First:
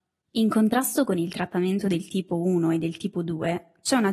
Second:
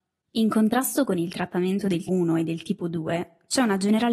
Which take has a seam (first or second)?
second